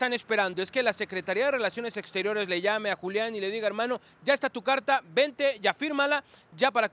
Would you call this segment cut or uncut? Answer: uncut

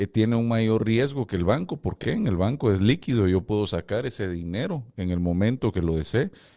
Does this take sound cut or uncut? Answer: uncut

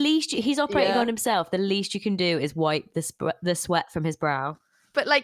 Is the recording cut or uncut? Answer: uncut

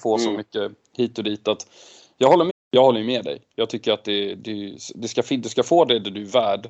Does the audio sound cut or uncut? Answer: cut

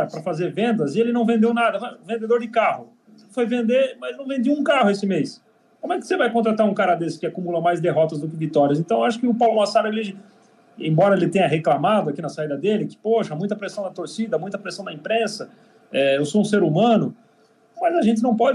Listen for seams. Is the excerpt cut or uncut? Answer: uncut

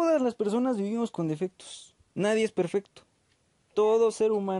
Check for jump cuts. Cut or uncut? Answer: uncut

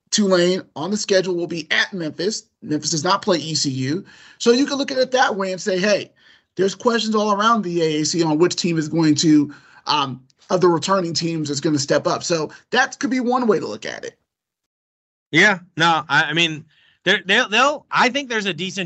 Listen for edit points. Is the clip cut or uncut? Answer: uncut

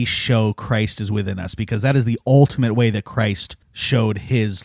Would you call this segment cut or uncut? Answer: cut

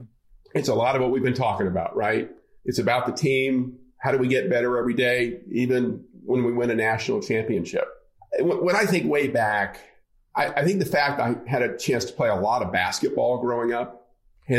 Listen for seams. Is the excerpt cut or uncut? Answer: cut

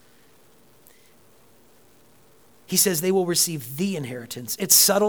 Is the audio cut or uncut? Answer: uncut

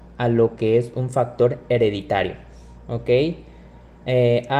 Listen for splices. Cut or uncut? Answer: uncut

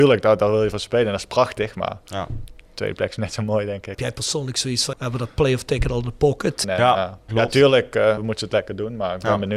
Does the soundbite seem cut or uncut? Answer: cut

